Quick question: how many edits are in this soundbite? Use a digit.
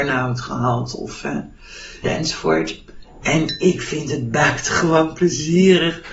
1